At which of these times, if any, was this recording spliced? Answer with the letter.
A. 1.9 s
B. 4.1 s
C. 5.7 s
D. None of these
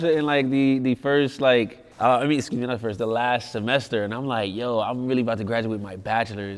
A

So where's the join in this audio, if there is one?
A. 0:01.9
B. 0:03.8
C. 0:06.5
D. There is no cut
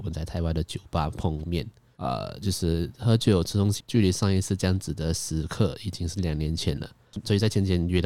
B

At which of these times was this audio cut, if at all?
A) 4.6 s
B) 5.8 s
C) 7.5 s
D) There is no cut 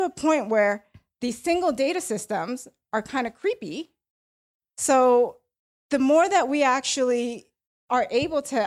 A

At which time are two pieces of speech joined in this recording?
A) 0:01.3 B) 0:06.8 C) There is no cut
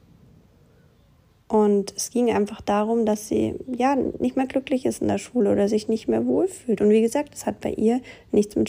C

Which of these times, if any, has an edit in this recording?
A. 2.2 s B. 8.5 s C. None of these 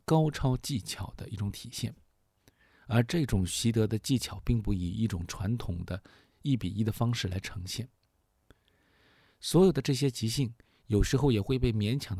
C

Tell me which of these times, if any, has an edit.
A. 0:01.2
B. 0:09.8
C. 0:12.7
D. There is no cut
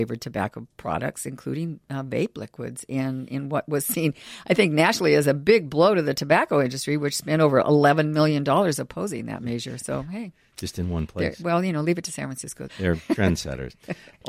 C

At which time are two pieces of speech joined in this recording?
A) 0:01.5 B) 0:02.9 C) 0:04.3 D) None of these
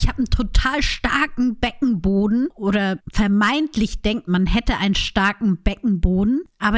C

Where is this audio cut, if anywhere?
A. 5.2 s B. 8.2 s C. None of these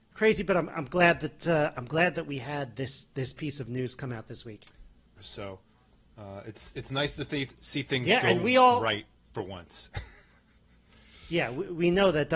A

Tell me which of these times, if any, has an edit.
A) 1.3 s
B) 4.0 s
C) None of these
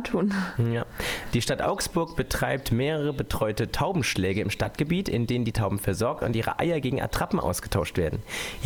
A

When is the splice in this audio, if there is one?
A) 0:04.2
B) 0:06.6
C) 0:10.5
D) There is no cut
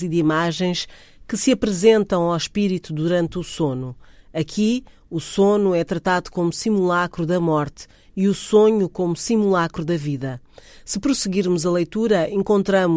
D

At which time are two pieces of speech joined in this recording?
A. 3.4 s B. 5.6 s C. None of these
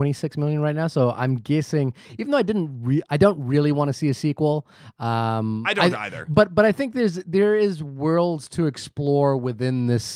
C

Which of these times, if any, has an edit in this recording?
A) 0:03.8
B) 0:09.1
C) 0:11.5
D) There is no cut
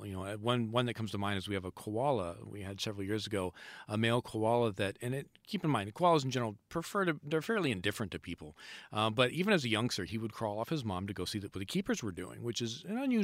D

